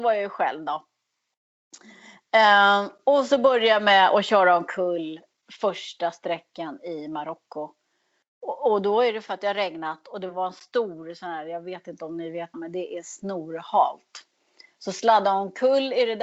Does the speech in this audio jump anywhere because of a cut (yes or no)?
yes